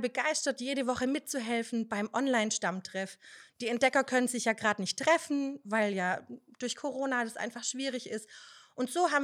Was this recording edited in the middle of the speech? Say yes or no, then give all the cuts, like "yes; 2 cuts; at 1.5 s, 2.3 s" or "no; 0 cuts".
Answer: no; 0 cuts